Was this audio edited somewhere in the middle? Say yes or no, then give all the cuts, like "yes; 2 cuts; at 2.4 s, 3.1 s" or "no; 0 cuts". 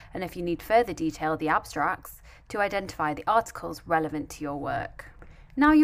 no; 0 cuts